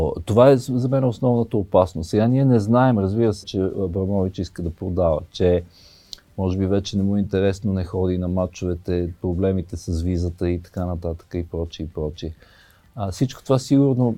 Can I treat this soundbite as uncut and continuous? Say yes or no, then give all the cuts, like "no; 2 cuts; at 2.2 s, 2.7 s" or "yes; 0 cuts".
no; 1 cut; at 3.4 s